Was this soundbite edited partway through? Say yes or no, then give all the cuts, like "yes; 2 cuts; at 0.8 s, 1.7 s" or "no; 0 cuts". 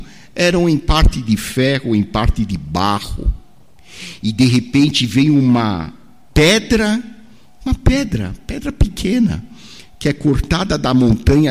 no; 0 cuts